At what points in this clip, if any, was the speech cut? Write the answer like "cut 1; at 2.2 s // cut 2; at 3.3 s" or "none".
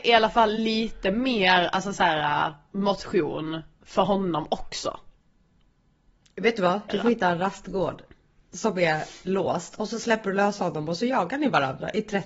cut 1; at 6.9 s